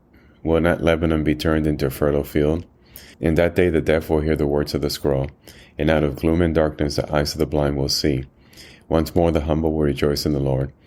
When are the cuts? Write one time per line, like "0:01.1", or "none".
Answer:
0:03.1